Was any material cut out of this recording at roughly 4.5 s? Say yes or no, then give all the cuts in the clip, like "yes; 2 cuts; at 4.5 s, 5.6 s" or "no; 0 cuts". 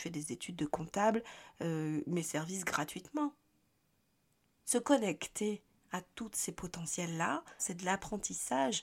no; 1 cut; at 7.6 s